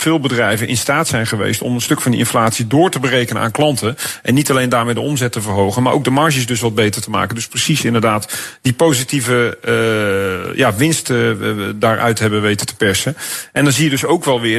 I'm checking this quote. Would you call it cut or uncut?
uncut